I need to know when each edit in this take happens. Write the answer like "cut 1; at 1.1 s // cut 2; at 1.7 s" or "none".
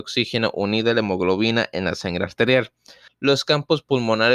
cut 1; at 3.1 s